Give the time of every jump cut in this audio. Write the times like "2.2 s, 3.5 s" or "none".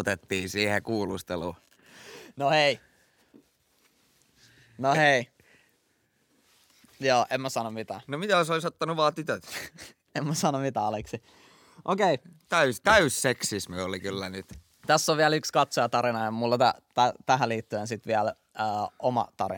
none

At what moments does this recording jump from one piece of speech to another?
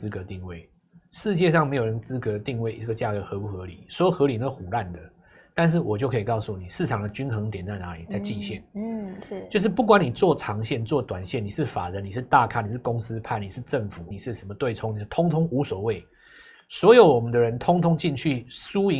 14.1 s

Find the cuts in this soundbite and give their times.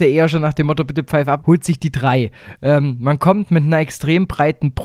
1.4 s

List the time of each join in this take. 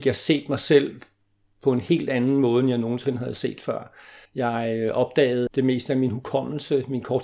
4.3 s, 5.5 s

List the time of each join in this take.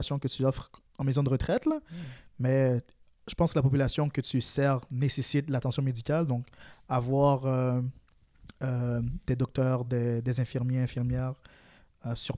none

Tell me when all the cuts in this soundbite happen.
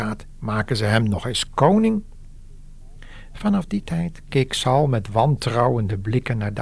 none

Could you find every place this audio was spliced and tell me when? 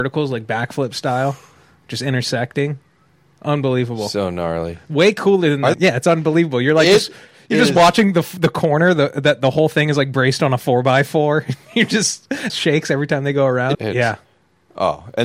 5.7 s, 12.5 s, 13.7 s

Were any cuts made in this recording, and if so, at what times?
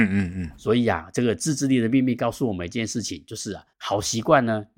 3.7 s

